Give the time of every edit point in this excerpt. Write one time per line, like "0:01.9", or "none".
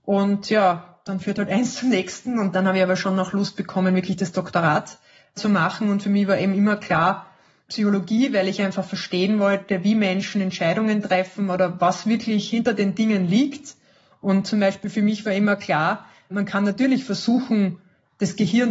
none